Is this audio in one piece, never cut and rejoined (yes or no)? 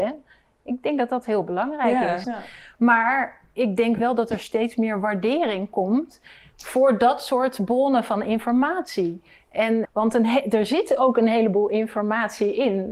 no